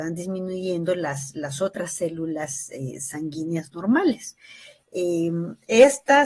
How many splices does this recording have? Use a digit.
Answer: 0